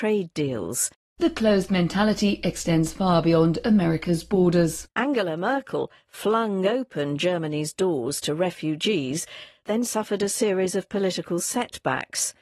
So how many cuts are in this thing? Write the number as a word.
one